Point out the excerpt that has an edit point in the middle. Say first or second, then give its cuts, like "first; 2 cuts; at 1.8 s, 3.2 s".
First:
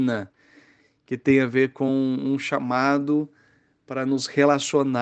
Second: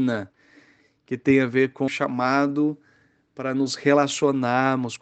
second; 1 cut; at 1.9 s